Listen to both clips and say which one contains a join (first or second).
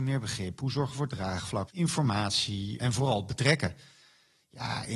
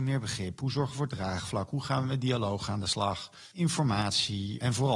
first